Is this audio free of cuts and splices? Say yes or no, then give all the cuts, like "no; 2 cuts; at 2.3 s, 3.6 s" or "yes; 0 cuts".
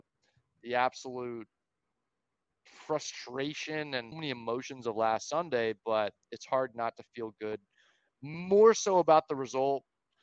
no; 2 cuts; at 4.1 s, 6.2 s